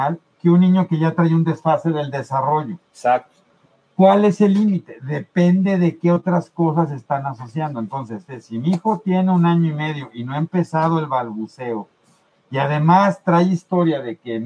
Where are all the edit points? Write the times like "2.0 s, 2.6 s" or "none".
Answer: 8.3 s

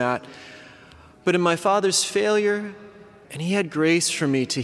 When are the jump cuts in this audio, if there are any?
3.2 s

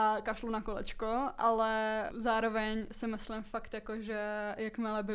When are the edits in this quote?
2.1 s

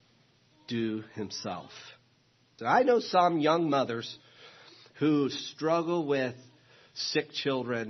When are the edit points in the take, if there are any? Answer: 2.6 s

